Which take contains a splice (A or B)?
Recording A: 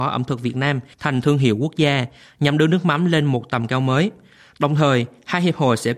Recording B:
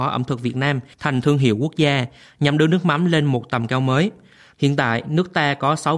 B